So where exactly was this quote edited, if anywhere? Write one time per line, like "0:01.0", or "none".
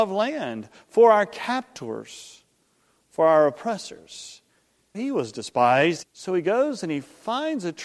0:04.9
0:06.0